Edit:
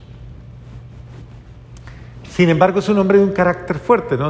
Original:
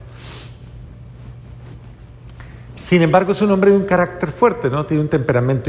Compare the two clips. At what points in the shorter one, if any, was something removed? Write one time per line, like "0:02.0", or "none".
none